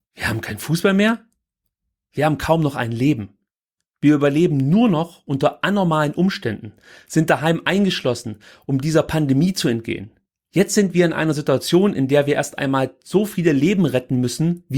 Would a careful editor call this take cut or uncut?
uncut